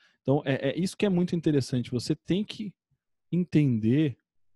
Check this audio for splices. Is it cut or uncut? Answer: uncut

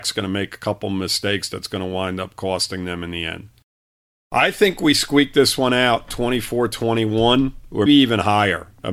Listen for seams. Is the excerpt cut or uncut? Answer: cut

